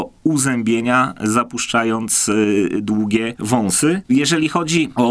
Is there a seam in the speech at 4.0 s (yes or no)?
yes